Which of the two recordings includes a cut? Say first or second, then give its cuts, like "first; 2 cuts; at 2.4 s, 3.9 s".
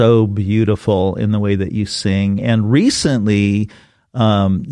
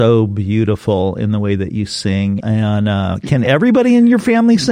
second; 1 cut; at 2.4 s